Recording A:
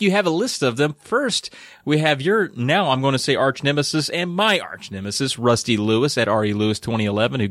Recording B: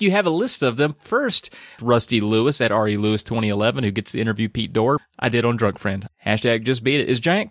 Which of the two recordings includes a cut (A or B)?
B